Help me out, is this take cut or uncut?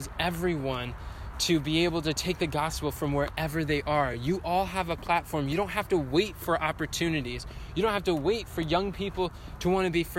uncut